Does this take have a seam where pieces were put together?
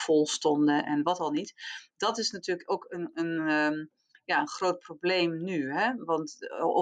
no; 0 cuts

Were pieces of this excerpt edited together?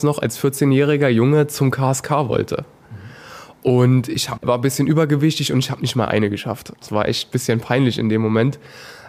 yes; 2 cuts; at 4.4 s, 6.8 s

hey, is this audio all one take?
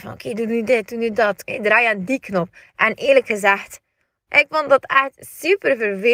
no; 3 cuts; at 1.4 s, 2.6 s, 4.2 s

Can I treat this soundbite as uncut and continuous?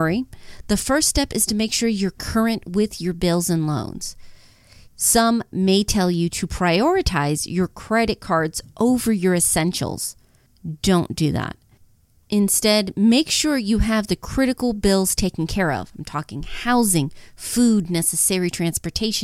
no; 1 cut; at 4.9 s

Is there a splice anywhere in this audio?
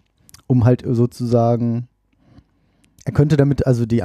yes; 1 cut; at 3.0 s

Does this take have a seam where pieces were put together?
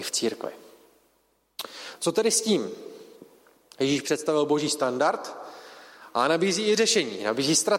no; 0 cuts

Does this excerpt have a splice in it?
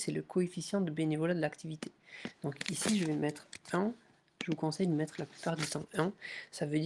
no; 0 cuts

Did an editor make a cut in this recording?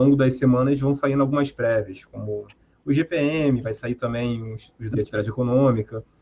yes; 1 cut; at 4.9 s

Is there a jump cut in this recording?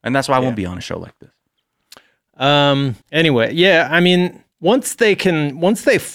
yes; 2 cuts; at 3.0 s, 4.5 s

